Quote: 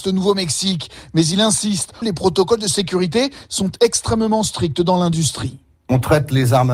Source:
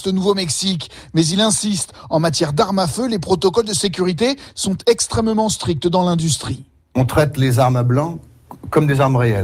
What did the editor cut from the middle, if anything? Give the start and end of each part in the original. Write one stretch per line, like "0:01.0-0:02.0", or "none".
0:02.0-0:03.1